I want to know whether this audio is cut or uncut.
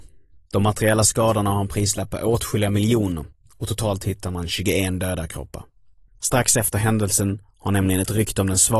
cut